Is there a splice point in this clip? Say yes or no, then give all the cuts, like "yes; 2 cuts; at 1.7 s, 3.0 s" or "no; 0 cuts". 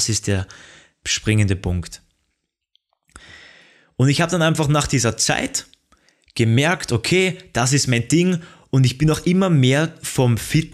no; 0 cuts